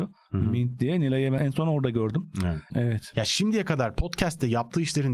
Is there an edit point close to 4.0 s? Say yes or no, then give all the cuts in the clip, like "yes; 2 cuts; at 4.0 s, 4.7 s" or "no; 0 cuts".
no; 2 cuts; at 1.4 s, 2.7 s